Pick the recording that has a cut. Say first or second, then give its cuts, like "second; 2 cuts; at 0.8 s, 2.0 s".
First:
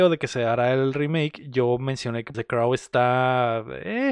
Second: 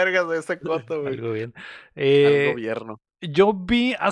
first; 1 cut; at 2.3 s